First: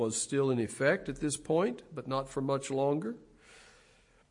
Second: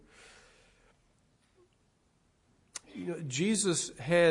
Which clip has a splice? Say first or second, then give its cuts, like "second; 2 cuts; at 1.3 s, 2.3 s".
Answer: second; 1 cut; at 2.8 s